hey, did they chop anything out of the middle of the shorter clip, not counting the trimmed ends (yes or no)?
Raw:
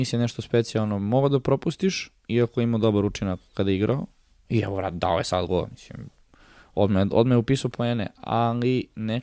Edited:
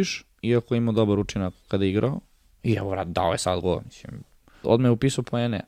yes